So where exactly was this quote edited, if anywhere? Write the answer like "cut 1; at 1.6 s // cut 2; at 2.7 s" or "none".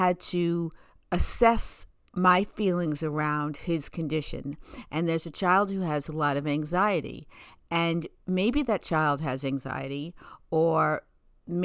cut 1; at 4.8 s